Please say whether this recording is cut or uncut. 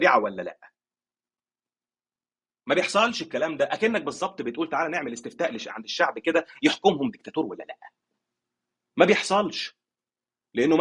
uncut